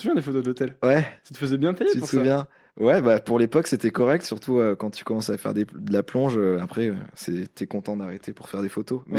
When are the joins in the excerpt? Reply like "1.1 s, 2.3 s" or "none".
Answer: none